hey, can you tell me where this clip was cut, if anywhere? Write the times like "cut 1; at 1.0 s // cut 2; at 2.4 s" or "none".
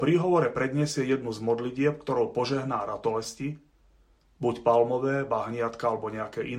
none